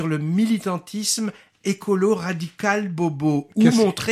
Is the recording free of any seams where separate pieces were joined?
yes; 0 cuts

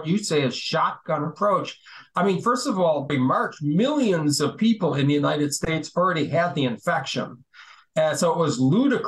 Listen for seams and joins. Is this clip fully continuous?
no; 1 cut; at 3.1 s

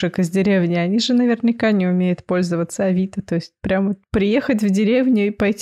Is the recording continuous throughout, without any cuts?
yes; 0 cuts

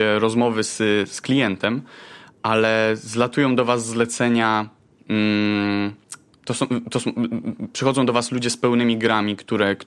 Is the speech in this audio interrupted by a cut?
no; 0 cuts

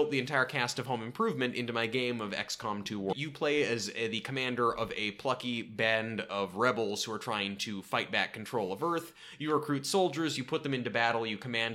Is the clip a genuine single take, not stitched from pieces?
no; 1 cut; at 3.1 s

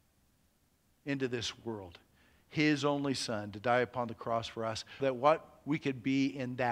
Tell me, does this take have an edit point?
yes; 1 cut; at 5.0 s

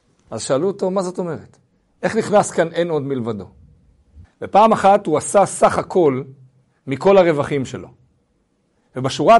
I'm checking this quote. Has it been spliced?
yes; 1 cut; at 4.2 s

